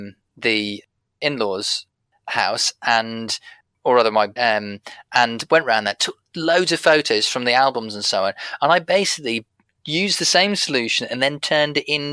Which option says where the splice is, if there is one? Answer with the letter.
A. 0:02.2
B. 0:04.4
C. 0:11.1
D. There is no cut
B